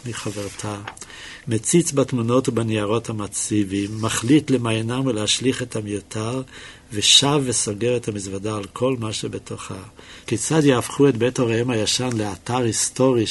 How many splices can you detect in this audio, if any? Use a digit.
2